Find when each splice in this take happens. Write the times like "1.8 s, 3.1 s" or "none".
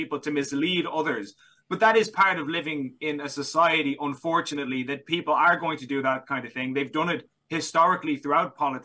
none